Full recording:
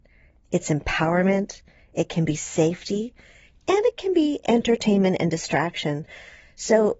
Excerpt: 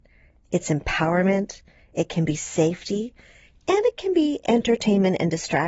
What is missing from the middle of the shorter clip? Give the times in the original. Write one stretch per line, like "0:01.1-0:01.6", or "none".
none